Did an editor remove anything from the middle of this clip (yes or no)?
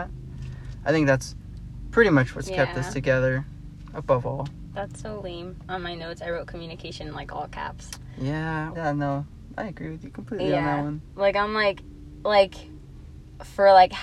yes